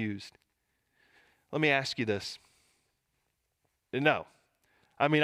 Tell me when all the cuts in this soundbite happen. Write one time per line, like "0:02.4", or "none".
0:03.7